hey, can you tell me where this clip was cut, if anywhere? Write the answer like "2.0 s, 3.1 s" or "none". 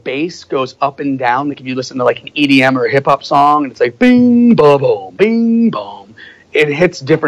none